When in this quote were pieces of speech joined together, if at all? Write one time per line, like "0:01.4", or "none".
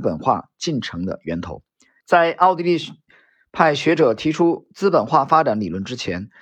0:02.0